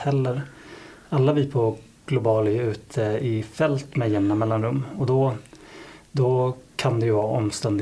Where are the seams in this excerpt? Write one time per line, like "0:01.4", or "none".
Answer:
none